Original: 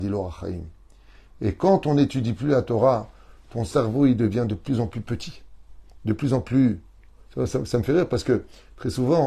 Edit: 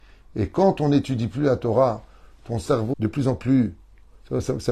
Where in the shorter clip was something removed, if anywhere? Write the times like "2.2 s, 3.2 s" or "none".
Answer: 2.9 s

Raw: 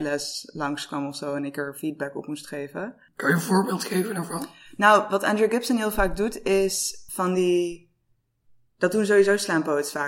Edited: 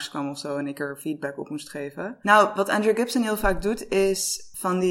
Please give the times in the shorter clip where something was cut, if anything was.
2.2 s

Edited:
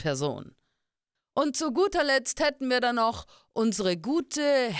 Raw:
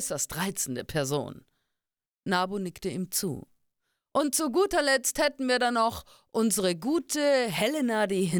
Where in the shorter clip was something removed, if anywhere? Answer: 1.2 s

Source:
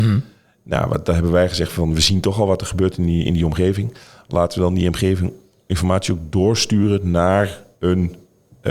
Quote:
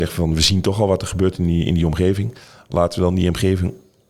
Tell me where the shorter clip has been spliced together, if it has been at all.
none

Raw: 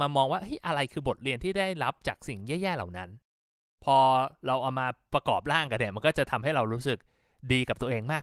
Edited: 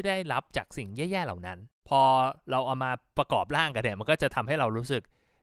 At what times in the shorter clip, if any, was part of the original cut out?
1.8 s

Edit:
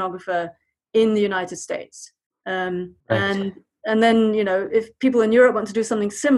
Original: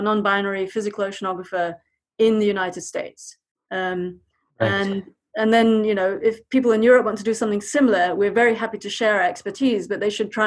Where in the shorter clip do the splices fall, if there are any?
3.0 s

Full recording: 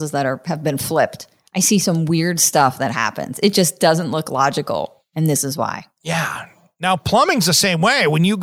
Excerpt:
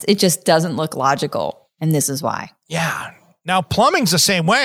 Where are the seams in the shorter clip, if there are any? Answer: none

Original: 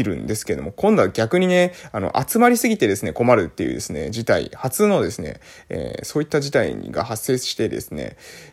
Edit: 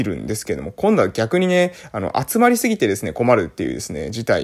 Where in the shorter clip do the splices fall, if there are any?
none

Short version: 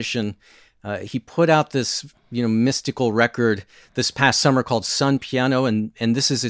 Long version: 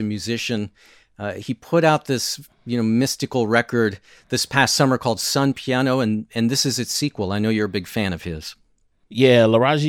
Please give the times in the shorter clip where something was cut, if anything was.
none

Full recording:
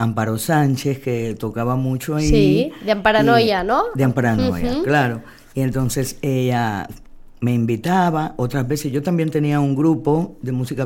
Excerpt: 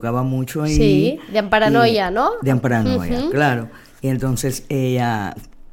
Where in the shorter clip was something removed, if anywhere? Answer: none

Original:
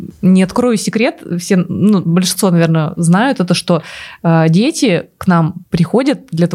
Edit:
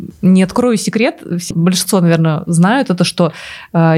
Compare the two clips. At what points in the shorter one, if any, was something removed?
1.5 s

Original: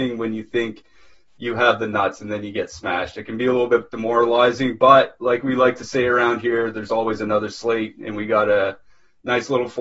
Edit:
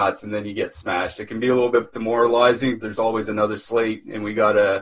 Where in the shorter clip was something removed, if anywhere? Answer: 2.8 s

